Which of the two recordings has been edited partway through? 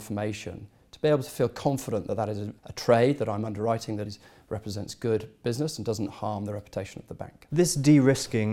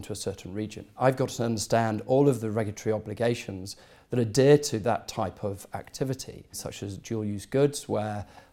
first; 2 cuts; at 2.6 s, 4.1 s

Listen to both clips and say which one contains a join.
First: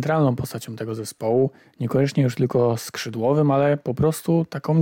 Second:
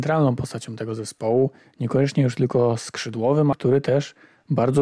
second; 1 cut; at 3.5 s

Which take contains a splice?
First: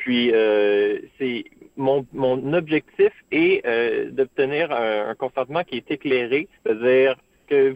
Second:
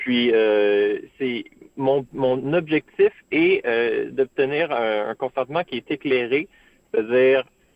first; 1 cut; at 6.6 s

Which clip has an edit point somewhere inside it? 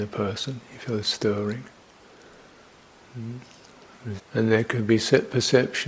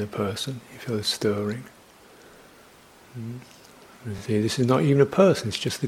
first; 1 cut; at 4.2 s

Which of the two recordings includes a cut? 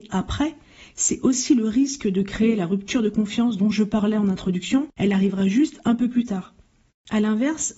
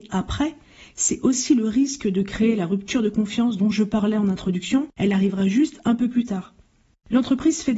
first; 1 cut; at 6.9 s

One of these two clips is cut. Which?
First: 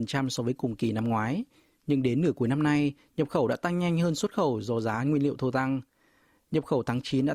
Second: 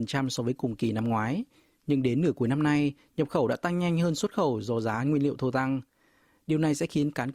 second; 1 cut; at 6.4 s

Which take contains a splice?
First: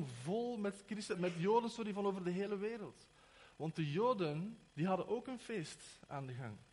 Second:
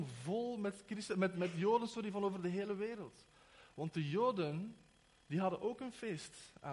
first; 2 cuts; at 1.1 s, 4.7 s

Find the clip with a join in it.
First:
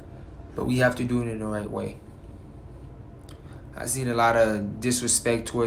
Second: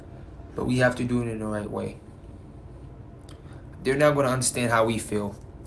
second; 1 cut; at 3.7 s

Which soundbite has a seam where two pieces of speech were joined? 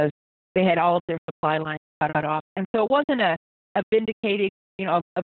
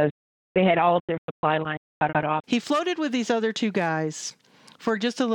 second; 1 cut; at 2.4 s

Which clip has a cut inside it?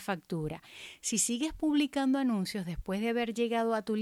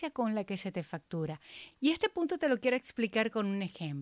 second; 1 cut; at 1.7 s

